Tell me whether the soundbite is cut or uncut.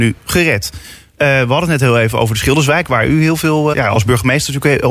cut